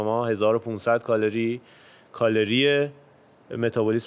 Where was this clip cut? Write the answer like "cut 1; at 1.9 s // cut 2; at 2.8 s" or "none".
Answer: none